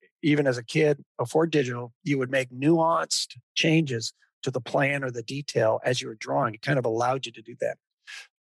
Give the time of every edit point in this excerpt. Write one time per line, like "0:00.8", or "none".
none

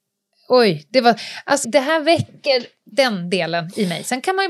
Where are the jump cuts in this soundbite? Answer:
0:01.6

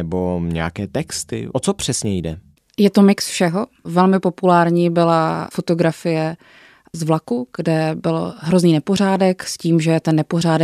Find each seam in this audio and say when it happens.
none

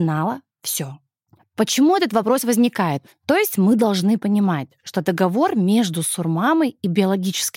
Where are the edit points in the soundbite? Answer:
0:03.1

